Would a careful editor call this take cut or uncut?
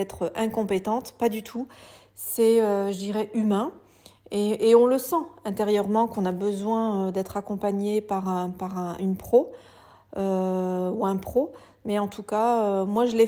uncut